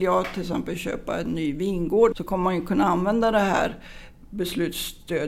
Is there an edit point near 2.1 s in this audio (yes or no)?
yes